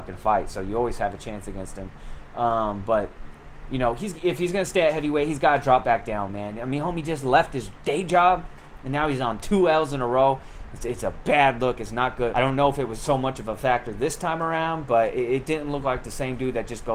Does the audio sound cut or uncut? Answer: cut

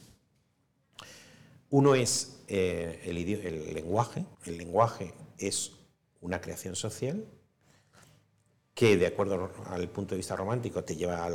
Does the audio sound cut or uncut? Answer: cut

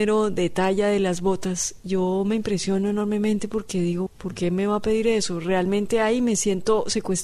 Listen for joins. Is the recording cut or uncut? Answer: cut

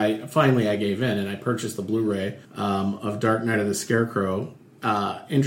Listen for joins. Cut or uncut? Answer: cut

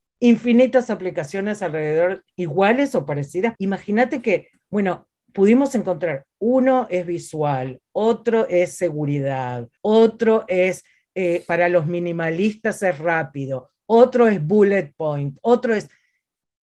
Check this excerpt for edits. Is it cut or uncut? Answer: cut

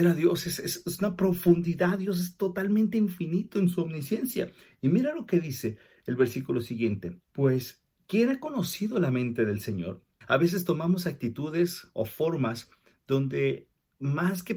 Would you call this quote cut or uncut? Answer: cut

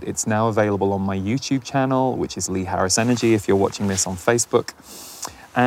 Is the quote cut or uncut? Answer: uncut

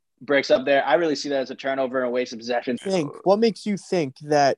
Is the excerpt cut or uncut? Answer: cut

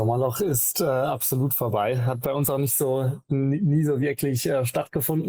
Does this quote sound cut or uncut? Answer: uncut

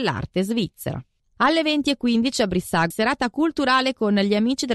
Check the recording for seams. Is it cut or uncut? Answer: cut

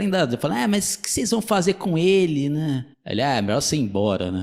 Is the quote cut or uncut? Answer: cut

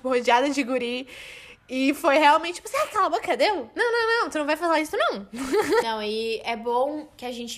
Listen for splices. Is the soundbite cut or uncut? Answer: cut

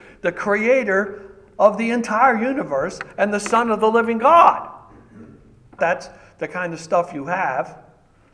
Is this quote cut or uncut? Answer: cut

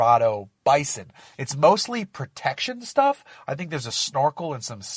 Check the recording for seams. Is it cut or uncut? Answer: cut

